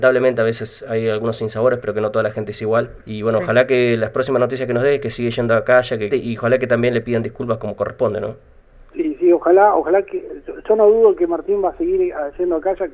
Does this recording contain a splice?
yes; 2 cuts; at 3.0 s, 6.1 s

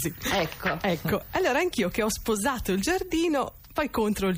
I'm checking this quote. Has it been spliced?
no; 0 cuts

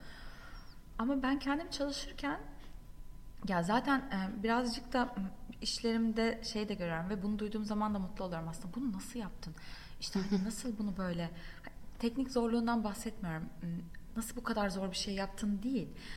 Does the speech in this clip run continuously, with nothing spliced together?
yes; 0 cuts

